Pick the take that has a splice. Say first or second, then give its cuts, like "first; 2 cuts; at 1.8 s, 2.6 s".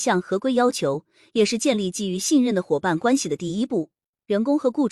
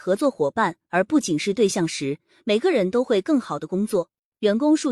second; 1 cut; at 1.2 s